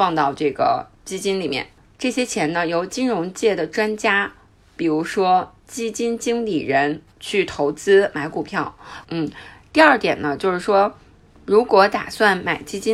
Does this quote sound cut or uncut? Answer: cut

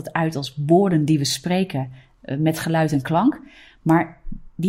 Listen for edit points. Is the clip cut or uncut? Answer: uncut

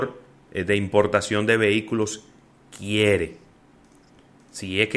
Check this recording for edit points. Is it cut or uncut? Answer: uncut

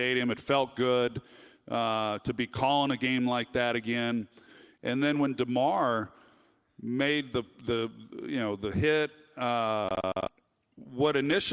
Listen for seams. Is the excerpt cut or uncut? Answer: uncut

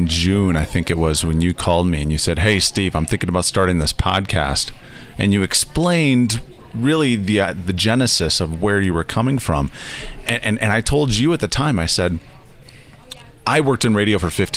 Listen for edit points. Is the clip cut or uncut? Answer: uncut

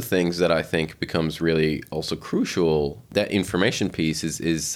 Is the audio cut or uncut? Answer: uncut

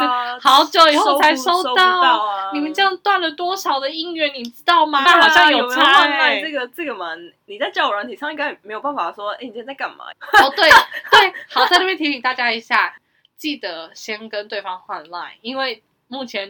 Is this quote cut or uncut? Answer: cut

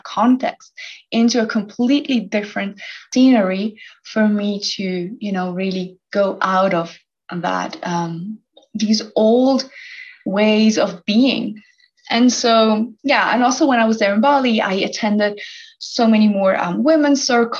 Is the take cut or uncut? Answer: uncut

